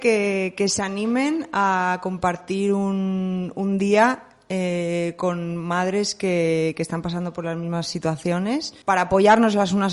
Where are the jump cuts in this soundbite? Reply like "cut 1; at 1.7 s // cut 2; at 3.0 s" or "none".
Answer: cut 1; at 8.8 s